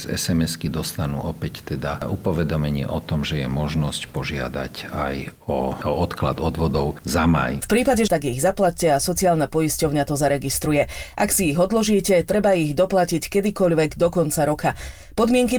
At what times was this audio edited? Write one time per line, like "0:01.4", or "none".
0:08.1